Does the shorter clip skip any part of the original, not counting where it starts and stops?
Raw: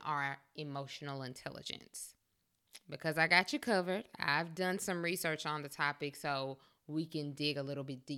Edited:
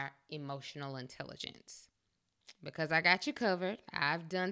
no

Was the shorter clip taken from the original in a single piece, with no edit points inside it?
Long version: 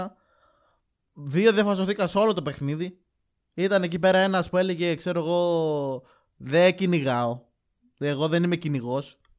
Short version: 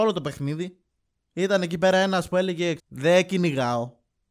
no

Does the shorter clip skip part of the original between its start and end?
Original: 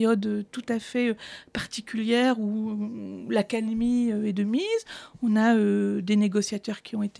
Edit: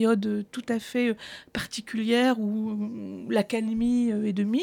no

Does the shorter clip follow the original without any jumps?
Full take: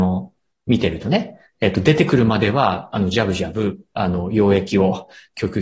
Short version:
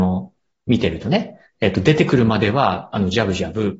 yes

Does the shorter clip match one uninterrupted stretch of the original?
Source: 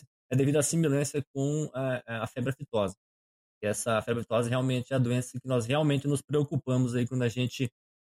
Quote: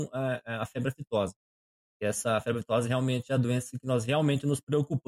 yes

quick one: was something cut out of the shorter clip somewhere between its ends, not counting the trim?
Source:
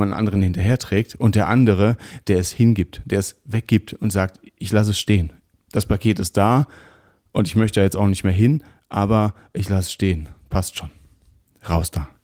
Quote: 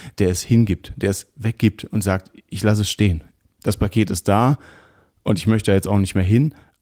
no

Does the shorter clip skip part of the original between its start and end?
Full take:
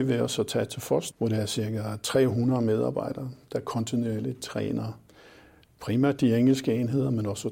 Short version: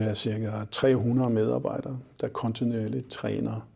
no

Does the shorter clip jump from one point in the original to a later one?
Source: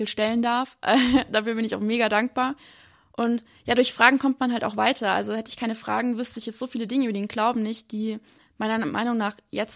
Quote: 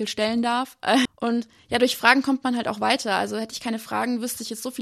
yes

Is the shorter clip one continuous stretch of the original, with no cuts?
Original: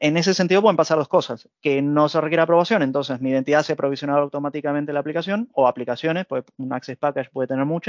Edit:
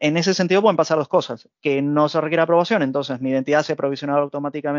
yes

